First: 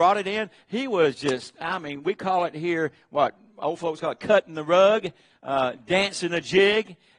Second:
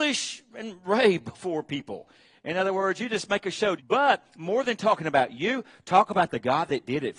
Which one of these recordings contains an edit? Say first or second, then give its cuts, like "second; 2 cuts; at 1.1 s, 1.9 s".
second; 1 cut; at 3.8 s